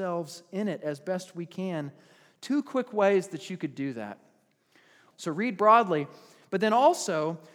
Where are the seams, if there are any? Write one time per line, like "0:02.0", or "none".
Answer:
0:05.1